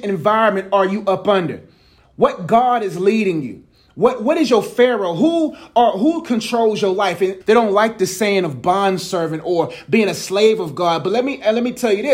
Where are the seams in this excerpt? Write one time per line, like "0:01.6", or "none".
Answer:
0:07.4